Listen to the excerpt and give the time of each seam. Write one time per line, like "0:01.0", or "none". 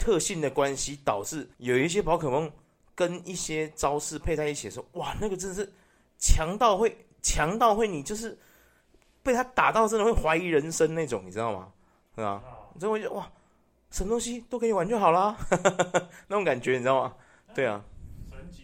0:01.5